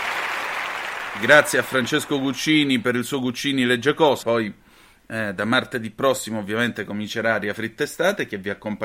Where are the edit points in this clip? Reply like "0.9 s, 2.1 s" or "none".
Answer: 4.2 s